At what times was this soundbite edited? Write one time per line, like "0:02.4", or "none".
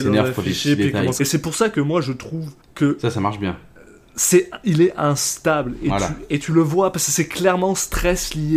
0:01.2